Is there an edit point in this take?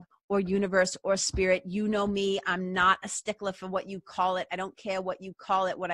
no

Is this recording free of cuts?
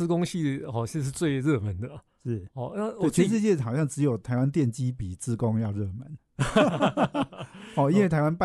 yes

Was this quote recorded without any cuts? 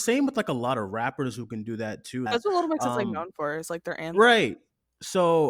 no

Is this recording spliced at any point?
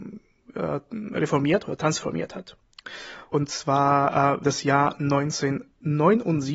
yes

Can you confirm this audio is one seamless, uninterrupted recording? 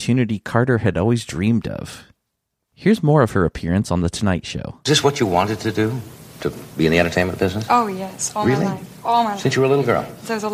yes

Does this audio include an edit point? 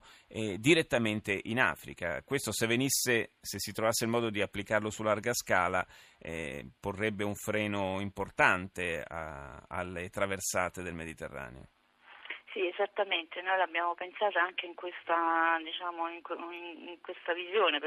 no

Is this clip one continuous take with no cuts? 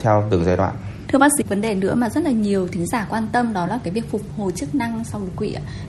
no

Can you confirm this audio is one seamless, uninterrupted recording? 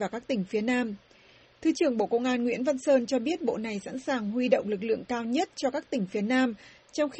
no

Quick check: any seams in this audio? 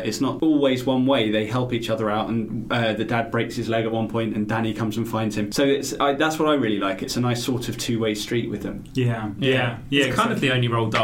no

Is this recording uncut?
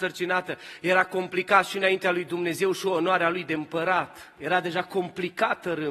yes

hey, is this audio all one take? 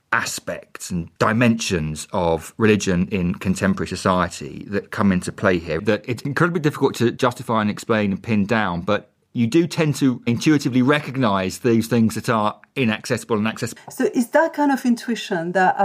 no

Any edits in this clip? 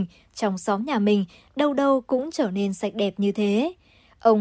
no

